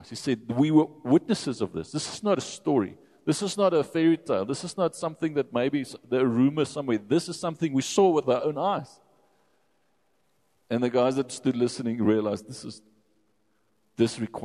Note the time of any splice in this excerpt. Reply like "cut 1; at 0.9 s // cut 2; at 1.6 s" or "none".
none